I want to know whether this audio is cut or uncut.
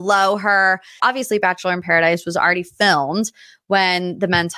cut